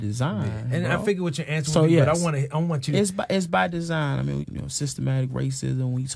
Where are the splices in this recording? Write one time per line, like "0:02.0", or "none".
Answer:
0:04.4